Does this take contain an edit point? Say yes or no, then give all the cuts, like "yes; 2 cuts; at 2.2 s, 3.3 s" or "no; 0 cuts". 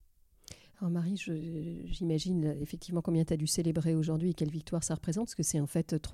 no; 0 cuts